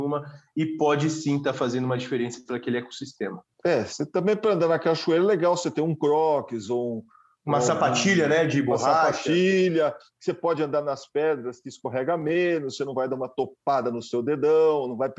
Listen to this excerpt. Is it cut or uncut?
cut